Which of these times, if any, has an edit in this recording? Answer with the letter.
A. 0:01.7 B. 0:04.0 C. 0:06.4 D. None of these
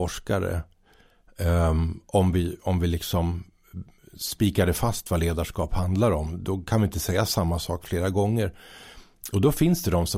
D